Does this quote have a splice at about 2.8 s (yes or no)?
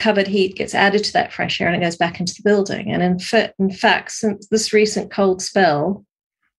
no